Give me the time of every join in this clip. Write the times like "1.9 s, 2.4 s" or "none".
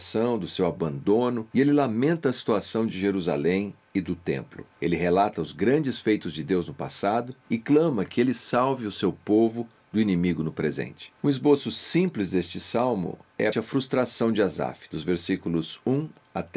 13.5 s